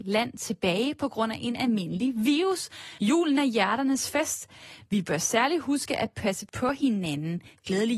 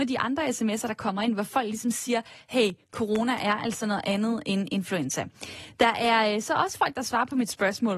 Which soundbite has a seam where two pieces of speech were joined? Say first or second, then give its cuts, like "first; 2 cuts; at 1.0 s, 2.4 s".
first; 1 cut; at 3.0 s